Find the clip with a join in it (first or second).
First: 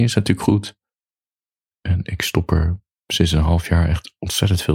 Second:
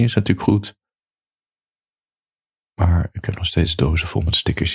first